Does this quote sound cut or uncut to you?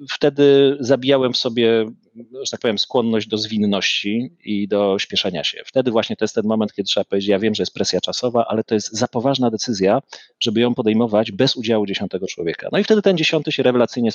uncut